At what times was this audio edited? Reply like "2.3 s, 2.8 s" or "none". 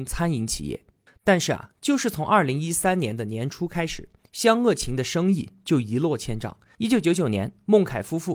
1.1 s, 6.7 s